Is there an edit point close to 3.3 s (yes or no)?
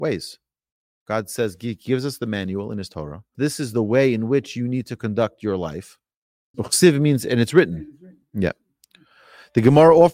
yes